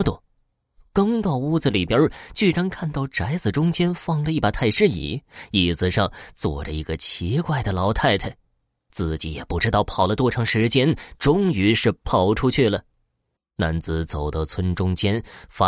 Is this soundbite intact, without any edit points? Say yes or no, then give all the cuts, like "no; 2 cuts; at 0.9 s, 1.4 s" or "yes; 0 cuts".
no; 2 cuts; at 8.9 s, 13.4 s